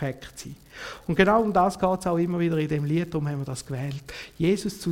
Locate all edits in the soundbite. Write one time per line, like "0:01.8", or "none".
none